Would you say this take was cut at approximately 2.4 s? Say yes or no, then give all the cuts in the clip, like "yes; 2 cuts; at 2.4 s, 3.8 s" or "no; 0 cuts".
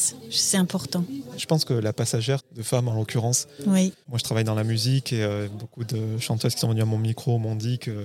yes; 1 cut; at 2.4 s